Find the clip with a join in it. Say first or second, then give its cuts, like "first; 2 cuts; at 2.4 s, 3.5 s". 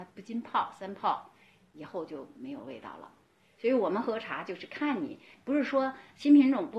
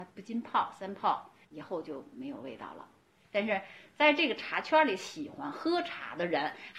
second; 2 cuts; at 1.4 s, 3.2 s